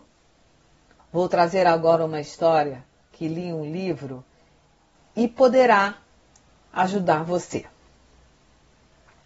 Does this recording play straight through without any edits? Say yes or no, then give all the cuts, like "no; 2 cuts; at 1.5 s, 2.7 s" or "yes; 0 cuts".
no; 1 cut; at 1.0 s